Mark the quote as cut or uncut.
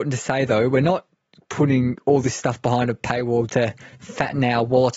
cut